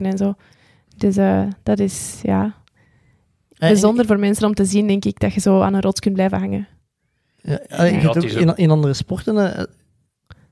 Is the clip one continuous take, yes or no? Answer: yes